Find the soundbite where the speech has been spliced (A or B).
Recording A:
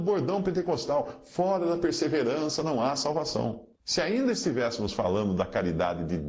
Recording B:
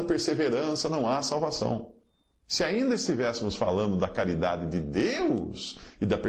A